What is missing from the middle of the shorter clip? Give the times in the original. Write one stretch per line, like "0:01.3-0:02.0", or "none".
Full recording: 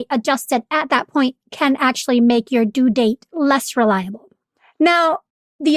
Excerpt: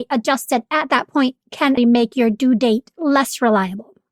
0:01.8-0:02.1